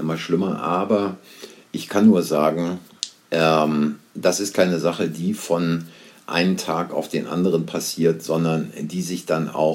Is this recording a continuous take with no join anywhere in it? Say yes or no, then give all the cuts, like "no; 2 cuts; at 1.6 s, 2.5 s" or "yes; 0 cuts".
yes; 0 cuts